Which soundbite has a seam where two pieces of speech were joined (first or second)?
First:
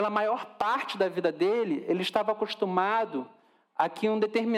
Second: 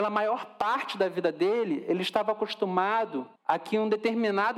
second